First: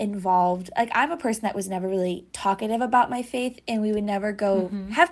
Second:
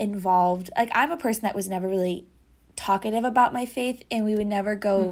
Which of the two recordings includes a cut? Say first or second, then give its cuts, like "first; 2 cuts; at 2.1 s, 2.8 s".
first; 1 cut; at 2.3 s